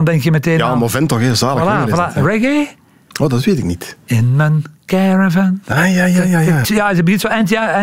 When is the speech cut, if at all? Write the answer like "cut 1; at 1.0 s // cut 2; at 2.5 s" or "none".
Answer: cut 1; at 4.8 s // cut 2; at 6.6 s